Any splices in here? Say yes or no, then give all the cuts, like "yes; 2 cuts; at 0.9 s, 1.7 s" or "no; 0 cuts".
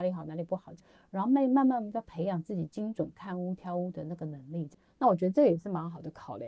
yes; 1 cut; at 4.9 s